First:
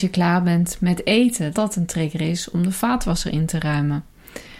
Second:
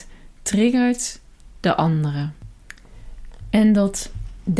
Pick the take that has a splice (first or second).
first